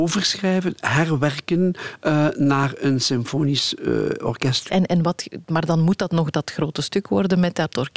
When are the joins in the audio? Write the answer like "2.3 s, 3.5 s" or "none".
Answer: 4.7 s